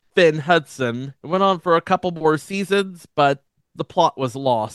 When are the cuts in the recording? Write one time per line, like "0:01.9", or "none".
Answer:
0:01.2